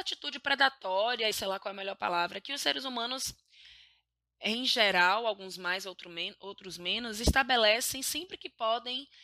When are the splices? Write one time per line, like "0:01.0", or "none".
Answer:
0:01.3

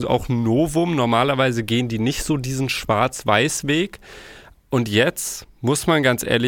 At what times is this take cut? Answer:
0:04.5

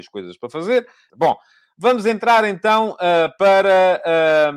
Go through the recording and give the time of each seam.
0:01.1

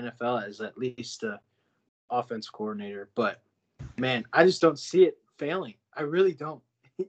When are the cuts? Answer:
none

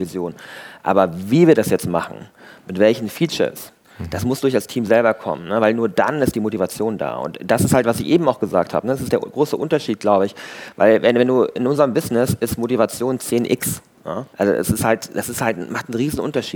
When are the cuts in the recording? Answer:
0:14.3

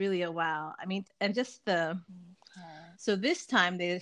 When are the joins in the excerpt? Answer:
0:01.0
0:02.9

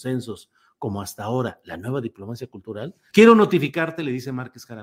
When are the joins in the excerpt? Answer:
0:03.1

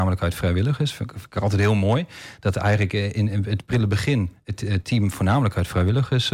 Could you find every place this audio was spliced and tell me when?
none

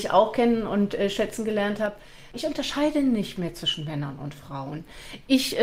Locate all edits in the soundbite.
0:02.3

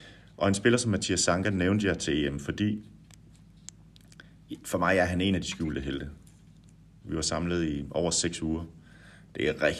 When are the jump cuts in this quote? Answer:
0:07.0

